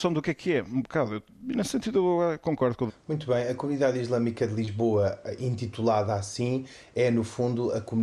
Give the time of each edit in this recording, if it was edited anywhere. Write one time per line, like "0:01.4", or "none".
0:02.9